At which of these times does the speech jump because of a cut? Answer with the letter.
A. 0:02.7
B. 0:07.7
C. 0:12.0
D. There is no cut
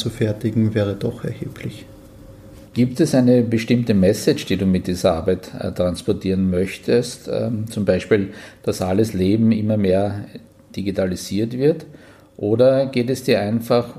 A